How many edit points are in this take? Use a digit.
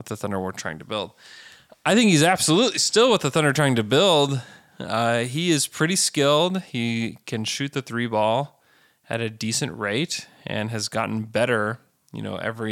0